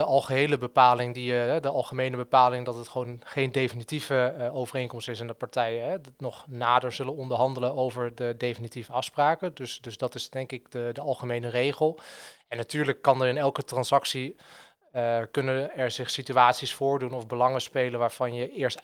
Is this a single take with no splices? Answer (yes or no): yes